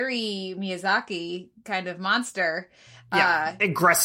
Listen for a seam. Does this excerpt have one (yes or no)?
no